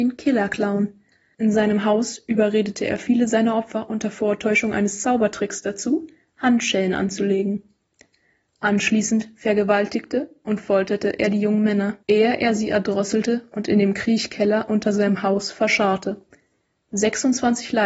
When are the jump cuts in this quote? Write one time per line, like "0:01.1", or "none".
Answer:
0:01.3
0:12.0